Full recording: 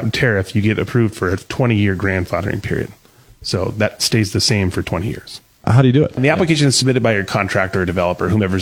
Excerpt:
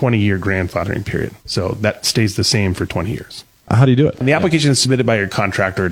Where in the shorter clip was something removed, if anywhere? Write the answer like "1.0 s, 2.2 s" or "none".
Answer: 1.4 s